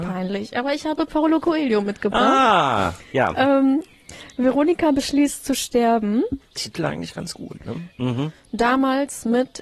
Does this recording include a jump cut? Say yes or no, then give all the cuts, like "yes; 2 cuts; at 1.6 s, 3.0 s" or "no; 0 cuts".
yes; 1 cut; at 8.0 s